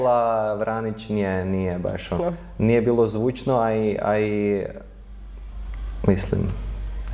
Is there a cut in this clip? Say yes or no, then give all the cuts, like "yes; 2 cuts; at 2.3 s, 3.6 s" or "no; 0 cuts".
yes; 1 cut; at 2.2 s